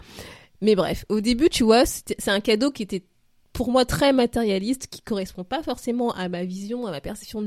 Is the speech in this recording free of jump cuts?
yes; 0 cuts

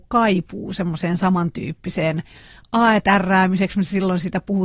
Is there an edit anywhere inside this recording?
no; 0 cuts

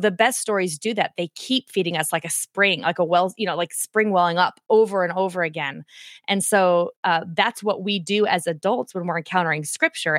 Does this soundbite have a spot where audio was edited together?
no; 0 cuts

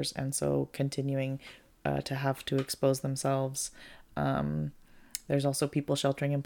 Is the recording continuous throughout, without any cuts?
yes; 0 cuts

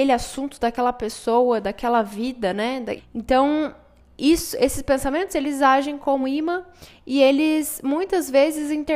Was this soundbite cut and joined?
yes; 2 cuts; at 3.0 s, 6.2 s

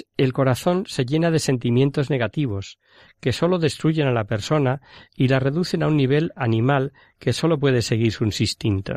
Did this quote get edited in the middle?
no; 0 cuts

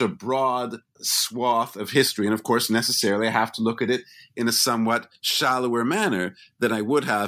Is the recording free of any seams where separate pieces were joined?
no; 1 cut; at 1.0 s

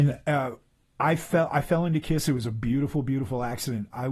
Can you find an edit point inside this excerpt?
no; 0 cuts

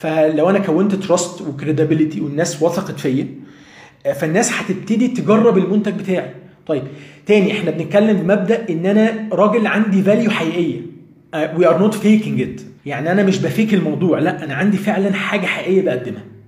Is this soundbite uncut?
no; 1 cut; at 12.8 s

